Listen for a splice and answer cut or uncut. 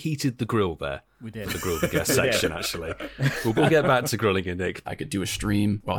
cut